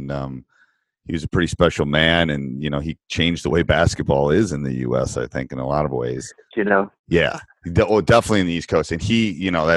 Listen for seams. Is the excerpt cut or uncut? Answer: cut